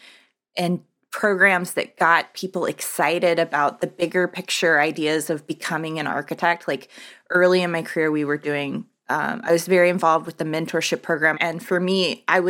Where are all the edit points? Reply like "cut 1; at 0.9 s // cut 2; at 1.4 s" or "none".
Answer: cut 1; at 11.3 s